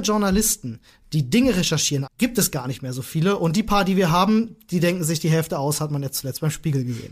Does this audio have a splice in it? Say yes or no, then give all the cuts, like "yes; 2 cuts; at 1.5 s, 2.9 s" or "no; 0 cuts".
yes; 1 cut; at 2.1 s